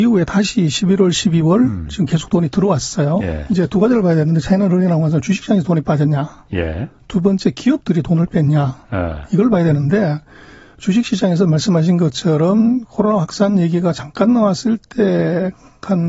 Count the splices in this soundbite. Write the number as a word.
one